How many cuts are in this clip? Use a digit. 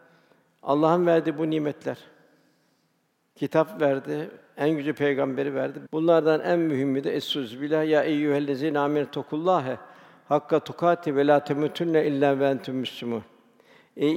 1